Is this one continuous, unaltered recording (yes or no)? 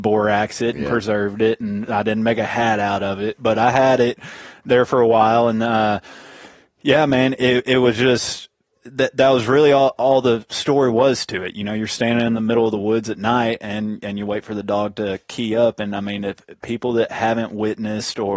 yes